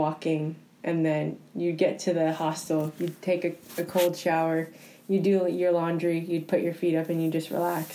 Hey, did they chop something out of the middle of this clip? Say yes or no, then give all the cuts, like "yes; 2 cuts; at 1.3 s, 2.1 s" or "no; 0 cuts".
no; 0 cuts